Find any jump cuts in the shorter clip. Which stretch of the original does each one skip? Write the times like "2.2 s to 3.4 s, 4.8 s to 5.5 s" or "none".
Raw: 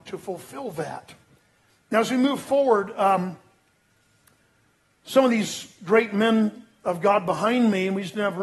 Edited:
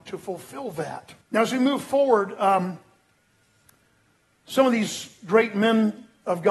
1.2 s to 1.8 s